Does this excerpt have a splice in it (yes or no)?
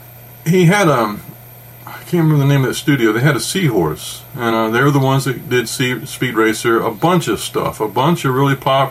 no